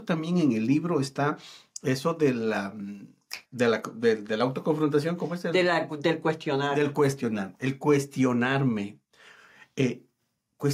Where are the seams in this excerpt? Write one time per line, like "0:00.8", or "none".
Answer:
0:03.5